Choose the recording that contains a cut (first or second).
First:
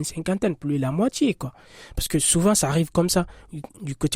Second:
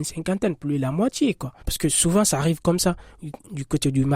second